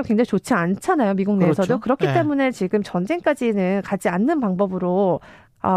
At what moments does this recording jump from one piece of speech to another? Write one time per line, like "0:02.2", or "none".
none